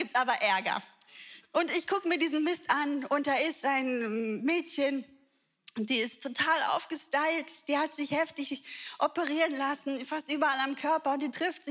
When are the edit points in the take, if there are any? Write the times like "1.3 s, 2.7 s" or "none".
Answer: 1.4 s